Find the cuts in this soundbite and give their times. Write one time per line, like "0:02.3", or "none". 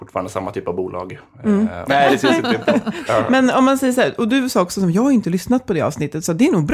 0:01.8
0:03.1